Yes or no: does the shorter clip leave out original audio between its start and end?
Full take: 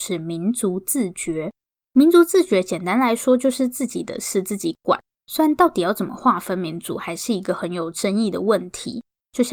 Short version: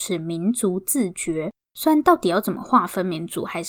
yes